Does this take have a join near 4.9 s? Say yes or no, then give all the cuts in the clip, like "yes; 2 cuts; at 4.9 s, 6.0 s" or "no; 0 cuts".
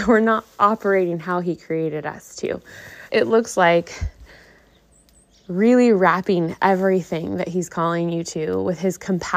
no; 1 cut; at 3.1 s